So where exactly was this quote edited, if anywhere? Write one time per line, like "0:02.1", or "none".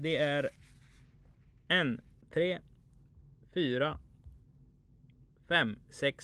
0:02.2